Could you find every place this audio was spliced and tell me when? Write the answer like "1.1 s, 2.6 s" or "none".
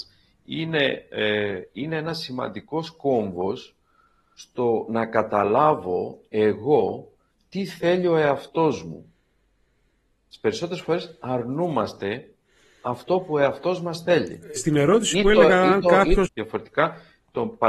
14.6 s, 16.3 s